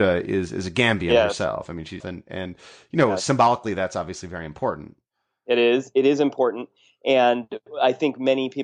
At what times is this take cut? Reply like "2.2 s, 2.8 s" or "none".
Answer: 2.0 s